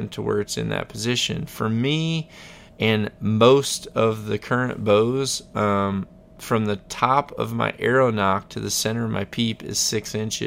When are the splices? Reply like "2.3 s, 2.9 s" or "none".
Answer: none